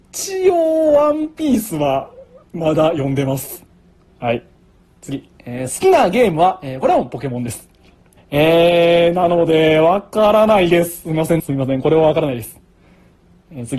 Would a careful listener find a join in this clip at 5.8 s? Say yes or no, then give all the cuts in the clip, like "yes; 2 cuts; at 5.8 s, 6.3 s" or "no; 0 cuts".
no; 2 cuts; at 8.2 s, 11.4 s